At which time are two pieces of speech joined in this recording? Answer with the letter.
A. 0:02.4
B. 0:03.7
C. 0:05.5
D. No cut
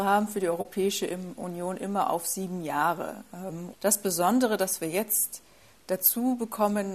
B